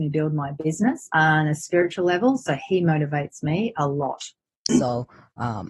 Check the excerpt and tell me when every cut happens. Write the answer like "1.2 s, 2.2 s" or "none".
1.1 s, 4.7 s